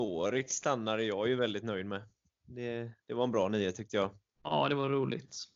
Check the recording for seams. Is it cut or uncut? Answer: cut